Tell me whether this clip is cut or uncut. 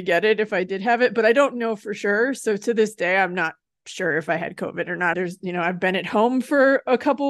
cut